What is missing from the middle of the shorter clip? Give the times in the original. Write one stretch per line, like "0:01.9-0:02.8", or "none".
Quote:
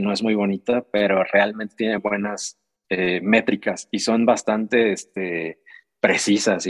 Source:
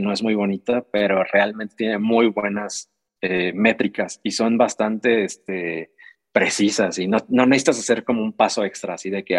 0:02.0-0:02.3

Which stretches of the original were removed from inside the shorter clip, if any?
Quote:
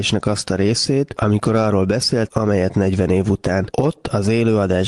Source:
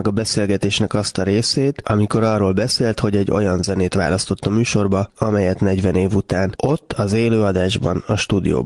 0:03.0-0:05.1

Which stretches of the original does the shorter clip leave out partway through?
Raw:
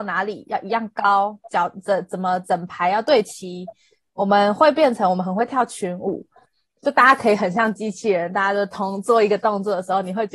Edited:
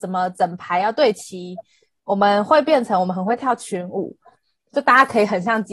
none

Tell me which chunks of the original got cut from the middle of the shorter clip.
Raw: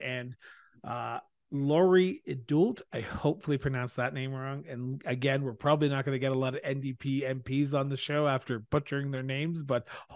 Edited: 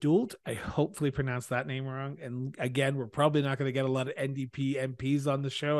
none

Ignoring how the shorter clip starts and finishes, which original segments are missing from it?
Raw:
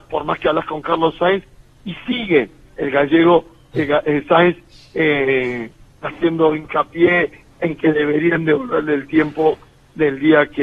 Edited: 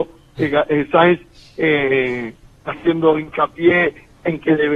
none

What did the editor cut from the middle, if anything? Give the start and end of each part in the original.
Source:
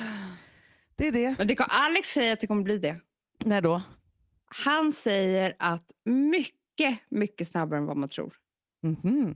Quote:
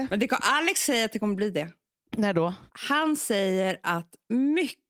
0:04.0-0:04.4

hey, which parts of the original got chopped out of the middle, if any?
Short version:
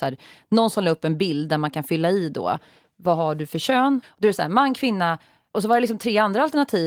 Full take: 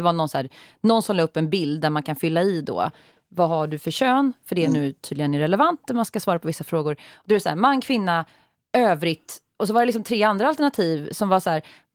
0:04.3-0:07.1
0:08.6-0:09.6

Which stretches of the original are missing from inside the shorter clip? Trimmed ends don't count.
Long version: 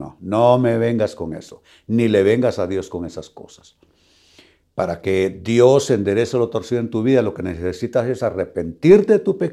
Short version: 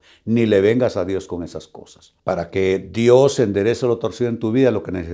0:03.8-0:04.7

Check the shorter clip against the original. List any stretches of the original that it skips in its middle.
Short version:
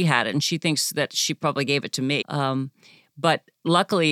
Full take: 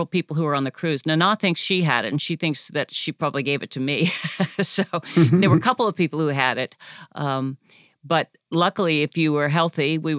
0:04.0-0:07.1

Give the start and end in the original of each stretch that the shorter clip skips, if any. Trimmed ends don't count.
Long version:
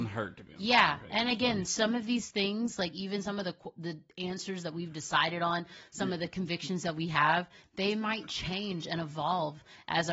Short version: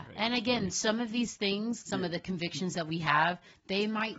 0:02.8-0:05.9

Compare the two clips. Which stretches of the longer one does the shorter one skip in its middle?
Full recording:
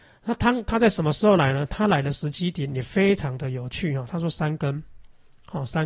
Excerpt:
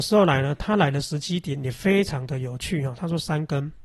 none

